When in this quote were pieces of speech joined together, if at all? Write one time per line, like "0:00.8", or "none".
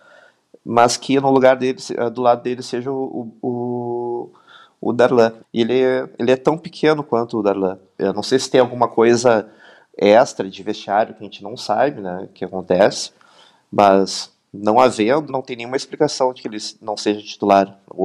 0:05.4
0:08.0
0:15.3